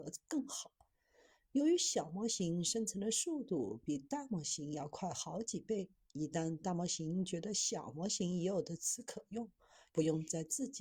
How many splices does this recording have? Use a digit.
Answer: 1